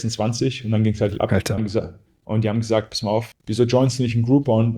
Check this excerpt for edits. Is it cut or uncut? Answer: cut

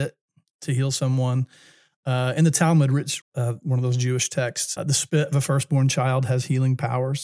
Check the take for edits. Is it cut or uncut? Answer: cut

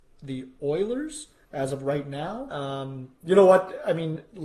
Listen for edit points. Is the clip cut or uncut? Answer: cut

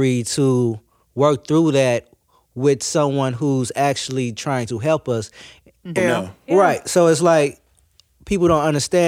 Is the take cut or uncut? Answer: cut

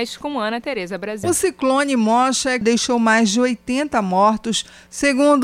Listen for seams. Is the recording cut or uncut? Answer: cut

